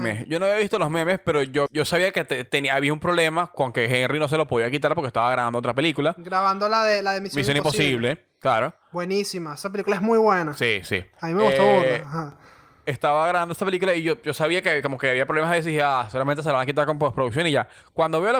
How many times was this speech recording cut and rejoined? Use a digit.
1